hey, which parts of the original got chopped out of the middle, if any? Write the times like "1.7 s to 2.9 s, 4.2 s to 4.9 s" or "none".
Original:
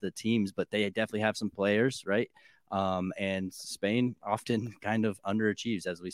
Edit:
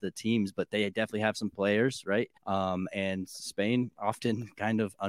2.4 s to 2.6 s